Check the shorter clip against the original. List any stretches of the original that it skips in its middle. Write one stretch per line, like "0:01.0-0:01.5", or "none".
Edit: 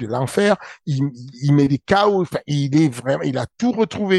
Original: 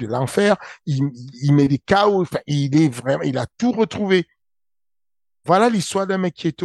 none